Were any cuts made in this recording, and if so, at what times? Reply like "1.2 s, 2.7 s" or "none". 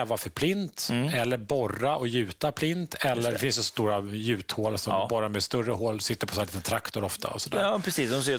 none

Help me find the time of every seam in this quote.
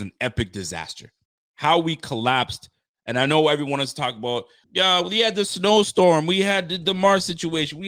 4.6 s

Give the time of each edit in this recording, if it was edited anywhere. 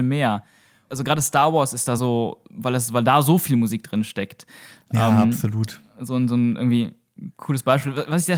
none

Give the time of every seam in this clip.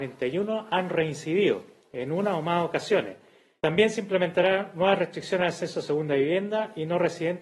3.6 s

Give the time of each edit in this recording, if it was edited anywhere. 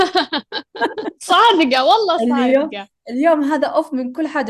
none

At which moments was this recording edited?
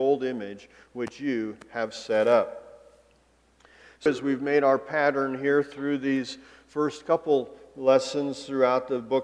4.1 s

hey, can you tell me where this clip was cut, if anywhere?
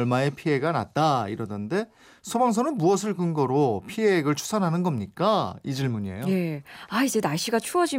none

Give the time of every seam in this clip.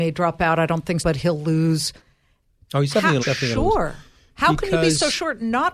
1.0 s, 3.2 s

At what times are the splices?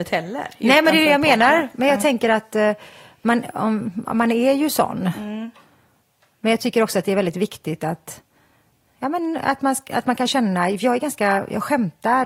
none

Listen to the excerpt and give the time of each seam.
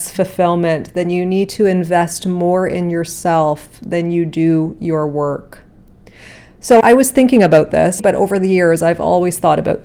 6.8 s, 8.0 s

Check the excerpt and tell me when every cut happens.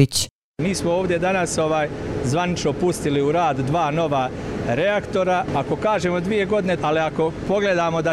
5.5 s, 6.8 s

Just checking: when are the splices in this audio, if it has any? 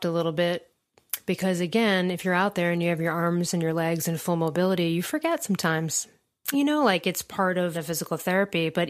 6.5 s, 7.7 s

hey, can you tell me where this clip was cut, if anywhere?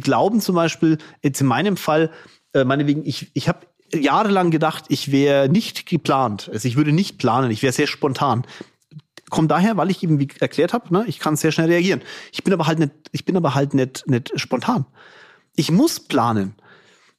none

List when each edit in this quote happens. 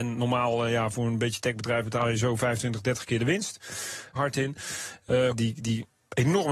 4.2 s, 5.3 s

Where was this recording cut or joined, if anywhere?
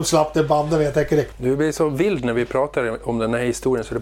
1.3 s

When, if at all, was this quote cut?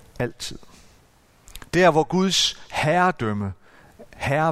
none

